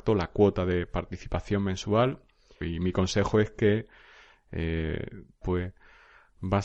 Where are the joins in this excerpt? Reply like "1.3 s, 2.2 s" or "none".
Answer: 2.6 s, 5.4 s